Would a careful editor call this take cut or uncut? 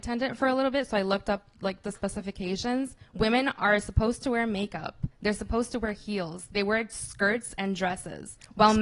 uncut